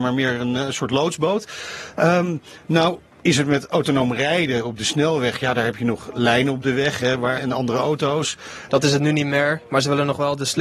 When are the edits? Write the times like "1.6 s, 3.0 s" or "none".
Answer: 7.4 s, 8.7 s